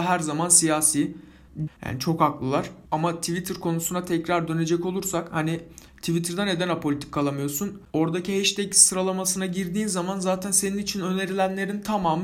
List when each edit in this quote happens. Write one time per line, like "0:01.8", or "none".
0:01.7